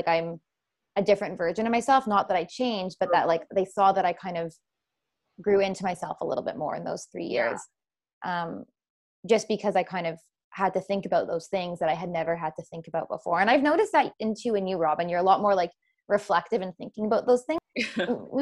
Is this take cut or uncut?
uncut